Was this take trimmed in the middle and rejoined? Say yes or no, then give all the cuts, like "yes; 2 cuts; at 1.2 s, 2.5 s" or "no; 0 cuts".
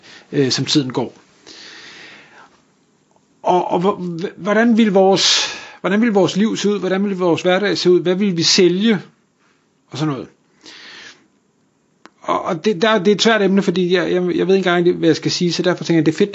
no; 0 cuts